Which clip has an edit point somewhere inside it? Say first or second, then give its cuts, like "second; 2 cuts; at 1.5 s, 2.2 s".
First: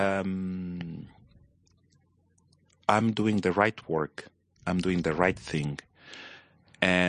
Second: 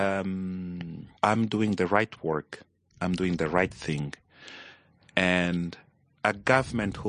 second; 1 cut; at 1.2 s